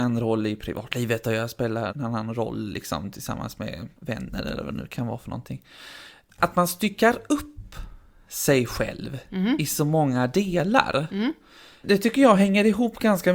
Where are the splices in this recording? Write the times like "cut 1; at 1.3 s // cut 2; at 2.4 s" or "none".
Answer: cut 1; at 1.9 s

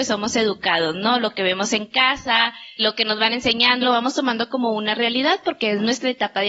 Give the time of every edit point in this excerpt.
cut 1; at 2.8 s // cut 2; at 3.8 s

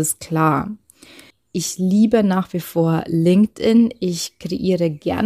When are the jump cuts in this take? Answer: cut 1; at 1.3 s

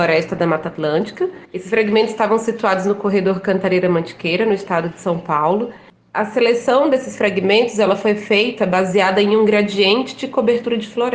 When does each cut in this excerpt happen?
cut 1; at 1.4 s

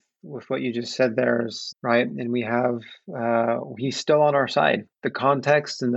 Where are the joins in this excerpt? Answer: cut 1; at 1.7 s

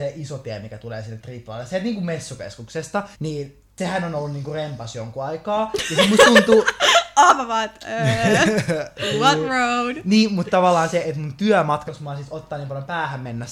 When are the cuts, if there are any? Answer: cut 1; at 3.1 s // cut 2; at 11.9 s

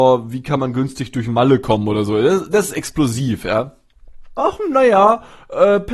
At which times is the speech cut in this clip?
cut 1; at 4.4 s

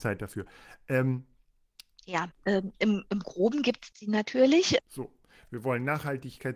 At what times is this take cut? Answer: cut 1; at 2.3 s // cut 2; at 4.8 s

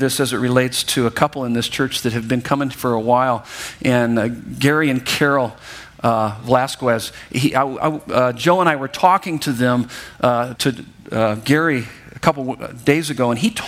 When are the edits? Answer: cut 1; at 10.6 s

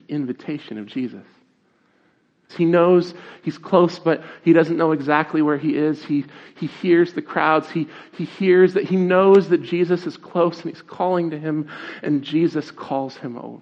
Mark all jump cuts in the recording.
cut 1; at 2.5 s

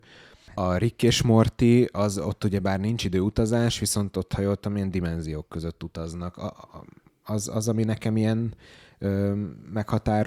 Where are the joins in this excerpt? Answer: none

